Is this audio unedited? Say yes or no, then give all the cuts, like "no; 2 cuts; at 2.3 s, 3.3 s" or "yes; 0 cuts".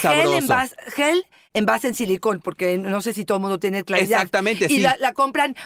yes; 0 cuts